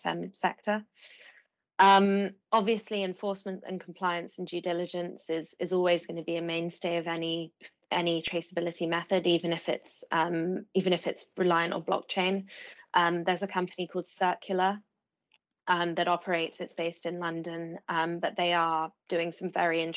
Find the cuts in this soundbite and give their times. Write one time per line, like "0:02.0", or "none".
0:02.4